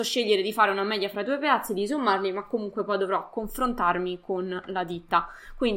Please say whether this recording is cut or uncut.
uncut